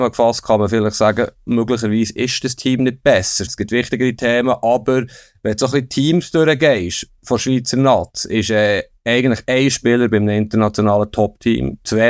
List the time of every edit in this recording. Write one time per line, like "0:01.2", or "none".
0:03.5